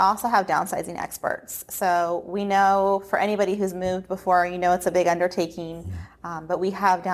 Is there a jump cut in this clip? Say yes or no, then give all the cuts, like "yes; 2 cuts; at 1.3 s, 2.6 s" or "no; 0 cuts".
no; 0 cuts